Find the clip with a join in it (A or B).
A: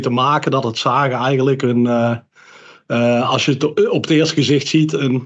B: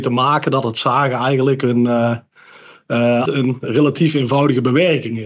B